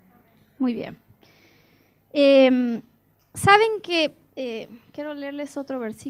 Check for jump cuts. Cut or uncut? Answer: uncut